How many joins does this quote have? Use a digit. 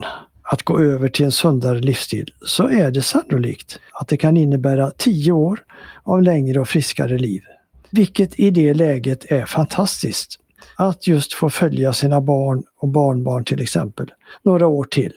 2